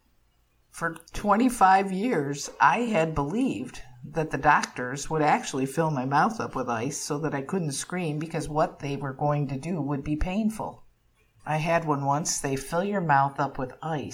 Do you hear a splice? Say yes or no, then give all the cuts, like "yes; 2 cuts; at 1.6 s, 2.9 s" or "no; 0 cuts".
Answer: yes; 2 cuts; at 1.1 s, 11.4 s